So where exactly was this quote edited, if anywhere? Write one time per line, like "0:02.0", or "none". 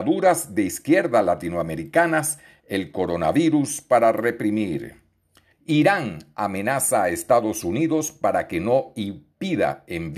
0:05.5